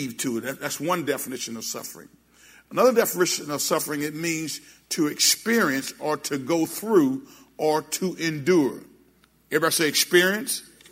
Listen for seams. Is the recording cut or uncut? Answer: uncut